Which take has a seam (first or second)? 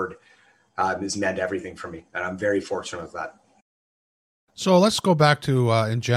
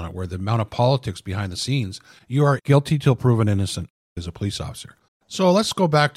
second